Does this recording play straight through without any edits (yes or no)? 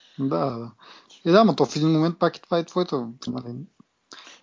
no